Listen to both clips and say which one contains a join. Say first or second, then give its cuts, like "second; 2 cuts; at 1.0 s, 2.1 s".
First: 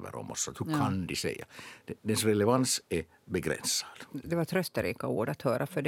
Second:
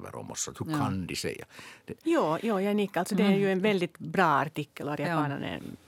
second; 1 cut; at 2.0 s